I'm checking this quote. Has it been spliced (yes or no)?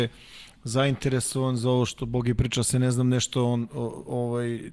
yes